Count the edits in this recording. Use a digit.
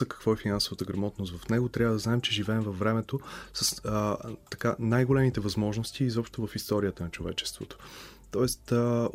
0